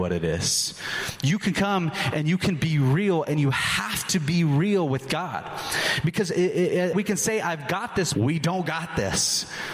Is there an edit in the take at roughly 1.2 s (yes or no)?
no